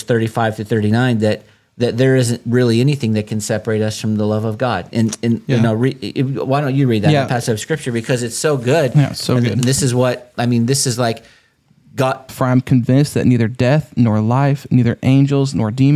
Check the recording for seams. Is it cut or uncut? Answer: cut